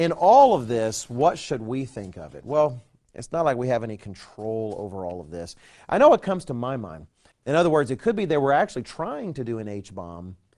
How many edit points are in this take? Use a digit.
1